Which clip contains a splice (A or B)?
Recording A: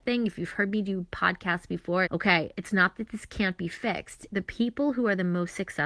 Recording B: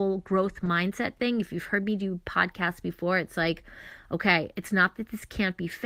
A